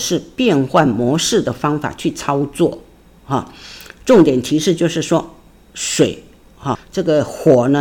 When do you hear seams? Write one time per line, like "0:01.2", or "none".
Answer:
0:06.7